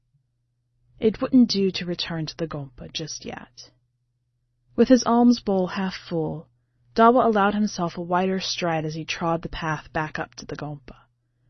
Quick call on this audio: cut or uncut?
cut